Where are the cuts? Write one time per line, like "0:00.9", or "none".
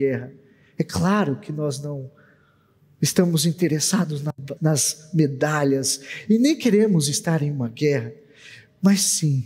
0:04.6